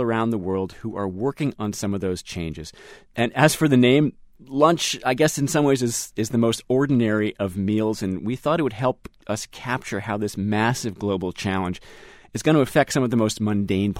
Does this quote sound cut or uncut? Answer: uncut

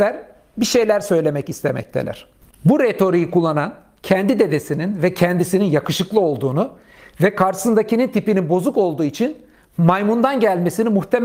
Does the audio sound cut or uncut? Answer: cut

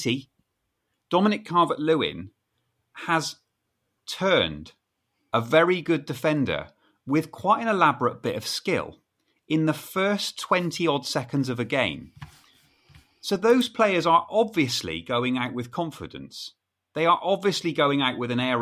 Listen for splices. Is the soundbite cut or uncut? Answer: uncut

